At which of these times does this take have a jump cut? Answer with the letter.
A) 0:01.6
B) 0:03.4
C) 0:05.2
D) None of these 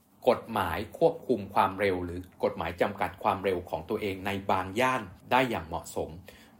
C